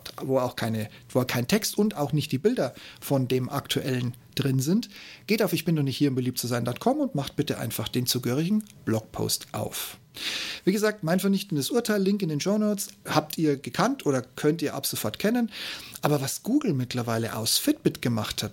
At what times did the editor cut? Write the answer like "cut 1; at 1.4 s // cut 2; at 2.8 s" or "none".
cut 1; at 13.1 s